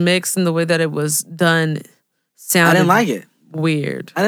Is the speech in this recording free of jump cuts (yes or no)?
yes